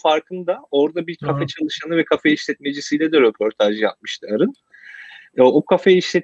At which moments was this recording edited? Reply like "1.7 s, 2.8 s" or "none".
none